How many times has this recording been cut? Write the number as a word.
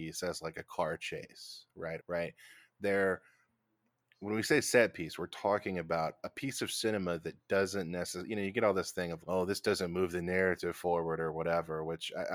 two